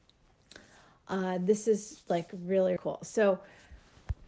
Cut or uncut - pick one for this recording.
cut